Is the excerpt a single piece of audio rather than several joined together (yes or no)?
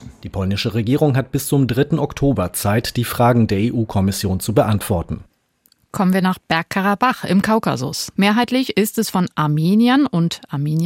no